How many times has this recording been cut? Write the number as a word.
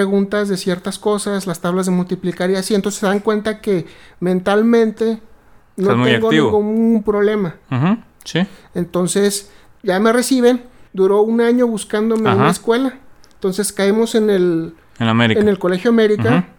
two